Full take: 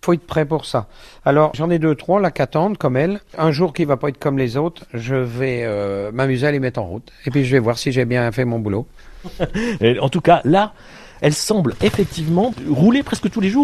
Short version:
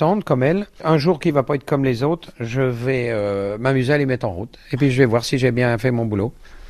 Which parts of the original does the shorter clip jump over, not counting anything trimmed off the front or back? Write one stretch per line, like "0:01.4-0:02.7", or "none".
none